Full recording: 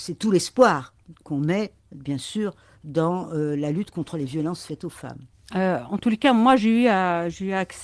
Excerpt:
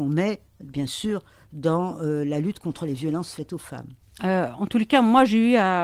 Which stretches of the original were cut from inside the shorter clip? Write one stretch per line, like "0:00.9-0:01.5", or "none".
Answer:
none